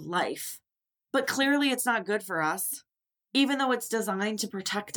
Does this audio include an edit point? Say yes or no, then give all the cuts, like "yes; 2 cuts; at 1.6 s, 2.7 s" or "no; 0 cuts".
no; 0 cuts